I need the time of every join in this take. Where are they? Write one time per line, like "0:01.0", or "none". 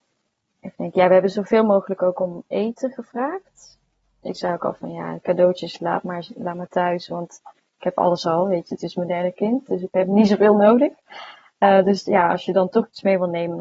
none